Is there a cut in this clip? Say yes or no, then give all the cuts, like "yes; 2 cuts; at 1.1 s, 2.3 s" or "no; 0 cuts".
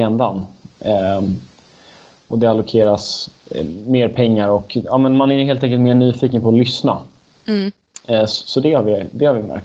no; 0 cuts